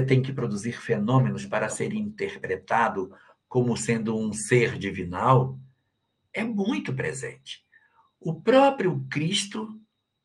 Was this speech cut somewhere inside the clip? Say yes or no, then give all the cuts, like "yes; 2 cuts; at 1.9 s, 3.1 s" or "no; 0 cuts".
no; 0 cuts